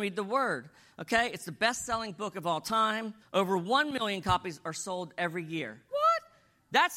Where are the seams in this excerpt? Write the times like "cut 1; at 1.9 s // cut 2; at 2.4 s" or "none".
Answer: cut 1; at 3.2 s // cut 2; at 5.9 s